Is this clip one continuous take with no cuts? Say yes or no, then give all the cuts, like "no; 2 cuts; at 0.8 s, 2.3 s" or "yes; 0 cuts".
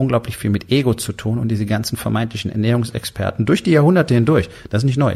yes; 0 cuts